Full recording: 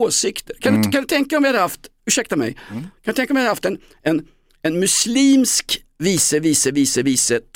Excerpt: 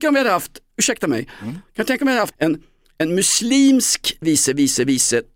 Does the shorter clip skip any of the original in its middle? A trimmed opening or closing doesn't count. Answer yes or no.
yes